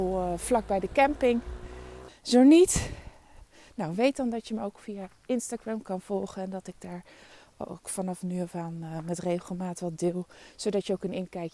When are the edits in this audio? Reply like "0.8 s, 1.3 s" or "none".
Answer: 2.1 s